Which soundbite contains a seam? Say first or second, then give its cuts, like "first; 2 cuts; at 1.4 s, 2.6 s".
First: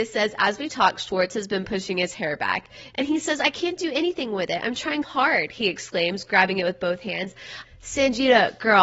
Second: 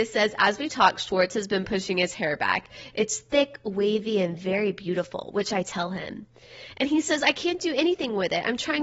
first; 3 cuts; at 2.9 s, 5.0 s, 7.6 s